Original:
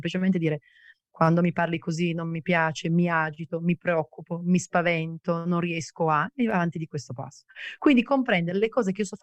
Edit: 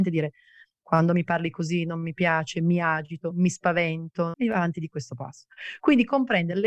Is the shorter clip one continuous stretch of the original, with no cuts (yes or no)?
no